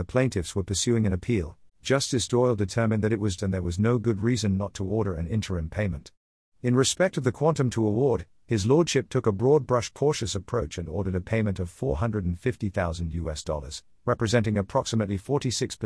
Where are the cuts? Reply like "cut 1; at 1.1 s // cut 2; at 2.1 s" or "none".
cut 1; at 1.7 s // cut 2; at 3.4 s